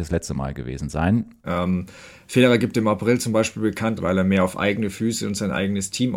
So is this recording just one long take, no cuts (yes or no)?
no